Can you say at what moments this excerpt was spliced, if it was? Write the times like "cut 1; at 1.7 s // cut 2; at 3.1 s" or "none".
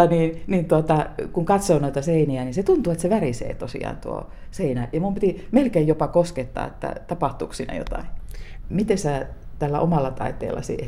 cut 1; at 8.6 s